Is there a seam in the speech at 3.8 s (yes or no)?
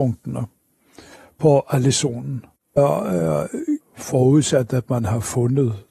yes